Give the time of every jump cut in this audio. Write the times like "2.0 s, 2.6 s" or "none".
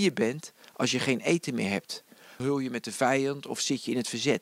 2.4 s